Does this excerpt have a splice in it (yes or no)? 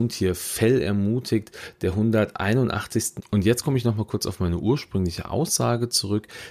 yes